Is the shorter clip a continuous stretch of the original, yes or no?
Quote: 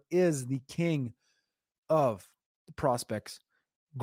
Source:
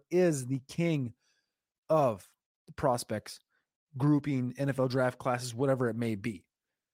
yes